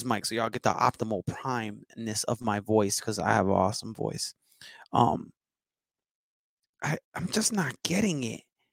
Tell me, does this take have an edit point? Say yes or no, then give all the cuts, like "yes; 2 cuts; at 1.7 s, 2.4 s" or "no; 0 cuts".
yes; 1 cut; at 7.0 s